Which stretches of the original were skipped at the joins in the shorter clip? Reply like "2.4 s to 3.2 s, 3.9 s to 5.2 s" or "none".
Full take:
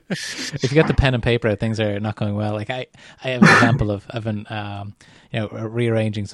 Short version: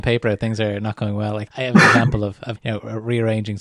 2.7 s to 3.1 s, 4.2 s to 5.2 s